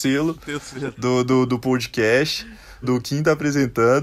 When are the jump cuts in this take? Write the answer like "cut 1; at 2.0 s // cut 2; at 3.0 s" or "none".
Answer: cut 1; at 2.8 s